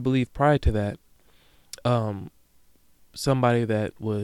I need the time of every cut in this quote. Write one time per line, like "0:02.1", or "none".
none